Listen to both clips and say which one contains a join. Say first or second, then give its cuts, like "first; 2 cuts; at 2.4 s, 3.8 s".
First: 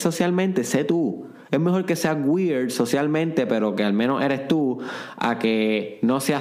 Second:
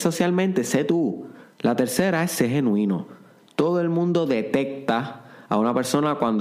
second; 1 cut; at 1.4 s